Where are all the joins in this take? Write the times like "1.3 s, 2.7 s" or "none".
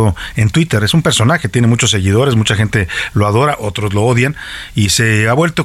none